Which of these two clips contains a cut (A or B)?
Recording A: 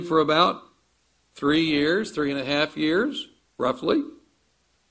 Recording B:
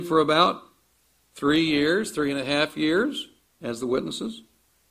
B